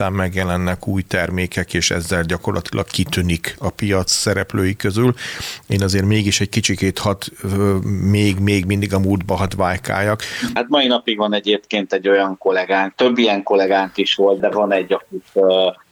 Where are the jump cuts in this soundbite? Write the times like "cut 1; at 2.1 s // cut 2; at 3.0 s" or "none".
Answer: cut 1; at 10.6 s // cut 2; at 14.4 s